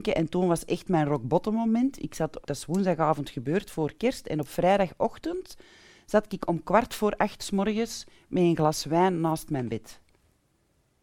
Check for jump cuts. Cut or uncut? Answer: cut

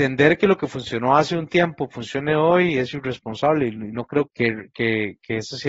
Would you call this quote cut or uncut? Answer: cut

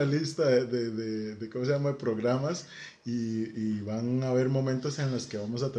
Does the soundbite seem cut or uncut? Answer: uncut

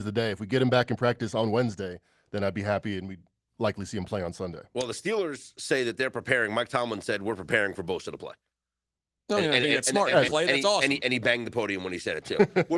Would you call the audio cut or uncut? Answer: cut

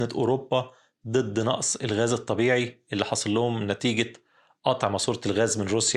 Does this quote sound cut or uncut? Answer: uncut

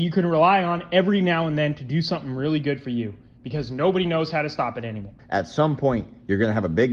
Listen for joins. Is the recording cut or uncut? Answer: cut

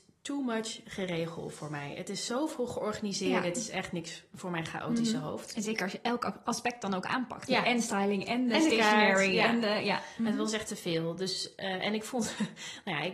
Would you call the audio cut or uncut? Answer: uncut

